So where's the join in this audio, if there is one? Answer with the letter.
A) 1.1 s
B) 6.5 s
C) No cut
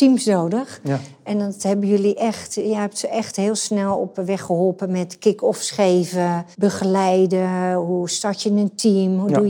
B